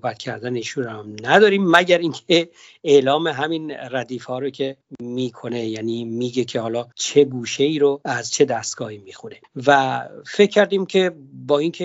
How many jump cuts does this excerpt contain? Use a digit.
1